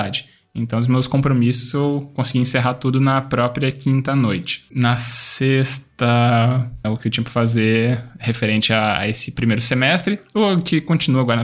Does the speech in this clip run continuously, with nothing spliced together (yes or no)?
no